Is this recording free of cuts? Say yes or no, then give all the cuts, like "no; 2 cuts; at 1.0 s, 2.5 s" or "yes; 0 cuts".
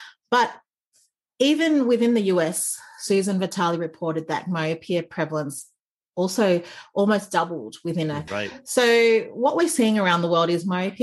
no; 1 cut; at 8.3 s